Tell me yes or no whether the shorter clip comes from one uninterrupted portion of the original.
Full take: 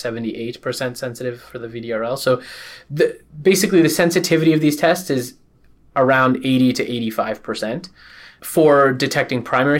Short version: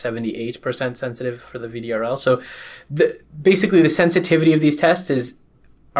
yes